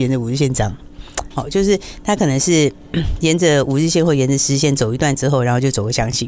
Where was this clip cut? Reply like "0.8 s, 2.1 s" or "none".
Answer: 1.3 s